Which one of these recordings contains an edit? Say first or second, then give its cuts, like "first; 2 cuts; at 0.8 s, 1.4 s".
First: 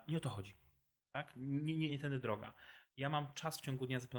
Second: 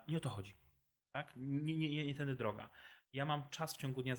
first; 1 cut; at 1.9 s